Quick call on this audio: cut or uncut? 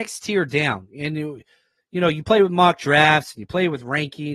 uncut